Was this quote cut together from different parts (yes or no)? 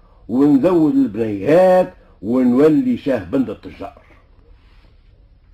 no